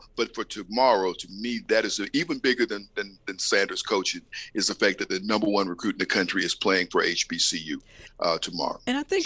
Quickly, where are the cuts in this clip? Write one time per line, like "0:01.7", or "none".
none